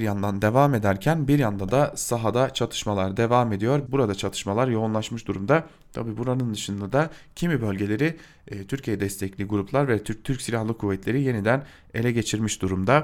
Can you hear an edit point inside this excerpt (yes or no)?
yes